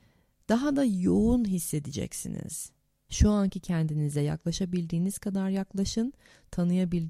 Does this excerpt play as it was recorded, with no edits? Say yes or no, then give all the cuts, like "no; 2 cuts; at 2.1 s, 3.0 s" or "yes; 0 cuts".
no; 1 cut; at 3.0 s